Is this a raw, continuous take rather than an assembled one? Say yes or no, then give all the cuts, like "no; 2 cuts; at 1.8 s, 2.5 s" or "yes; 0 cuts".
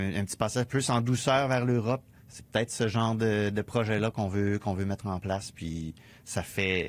yes; 0 cuts